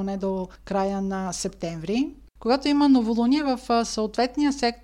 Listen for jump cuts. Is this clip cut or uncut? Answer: cut